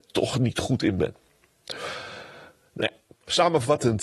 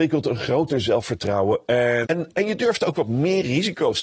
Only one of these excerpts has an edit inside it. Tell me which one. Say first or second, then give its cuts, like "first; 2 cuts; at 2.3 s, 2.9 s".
second; 1 cut; at 2.1 s